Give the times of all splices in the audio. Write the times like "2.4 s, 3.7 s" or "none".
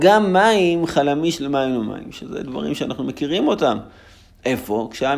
none